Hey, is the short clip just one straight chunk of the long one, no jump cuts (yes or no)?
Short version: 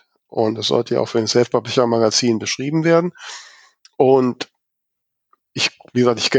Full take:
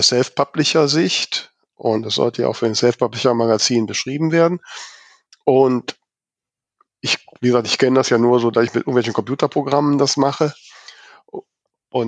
yes